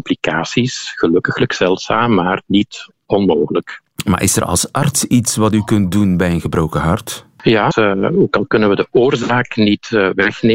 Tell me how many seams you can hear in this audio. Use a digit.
1